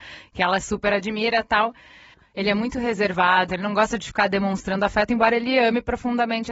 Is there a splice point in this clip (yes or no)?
yes